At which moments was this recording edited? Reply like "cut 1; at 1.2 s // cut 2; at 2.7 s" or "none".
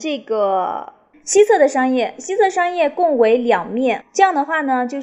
cut 1; at 1.1 s // cut 2; at 4.0 s